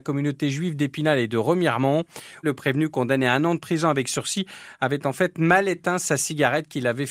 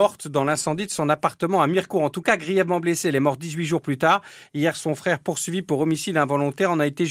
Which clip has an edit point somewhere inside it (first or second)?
first